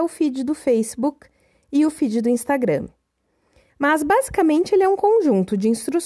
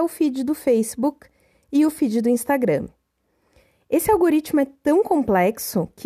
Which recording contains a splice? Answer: first; 1 cut; at 3.7 s

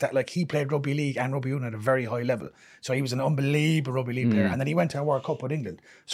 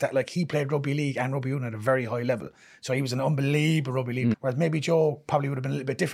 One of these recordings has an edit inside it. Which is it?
second; 1 cut; at 4.3 s

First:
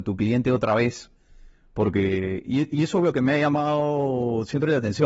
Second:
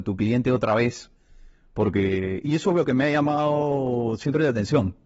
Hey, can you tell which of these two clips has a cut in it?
second; 1 cut; at 2.4 s

